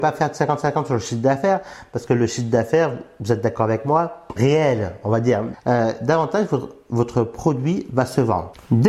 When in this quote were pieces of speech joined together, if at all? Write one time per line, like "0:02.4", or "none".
0:04.4
0:05.5